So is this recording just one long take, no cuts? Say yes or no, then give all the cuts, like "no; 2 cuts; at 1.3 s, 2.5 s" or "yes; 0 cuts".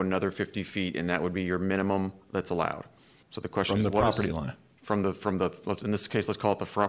no; 1 cut; at 3.2 s